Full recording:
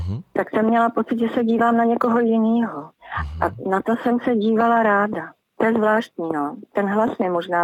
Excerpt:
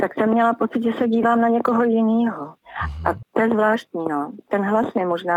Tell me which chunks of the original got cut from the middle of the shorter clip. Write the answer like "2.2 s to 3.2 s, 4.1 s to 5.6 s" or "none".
3.6 s to 5.5 s